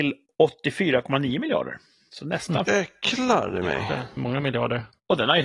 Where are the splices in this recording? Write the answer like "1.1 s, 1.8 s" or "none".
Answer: 2.7 s